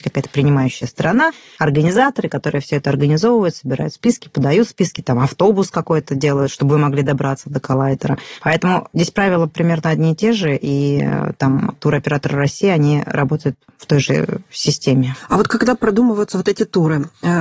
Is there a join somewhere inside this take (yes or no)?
no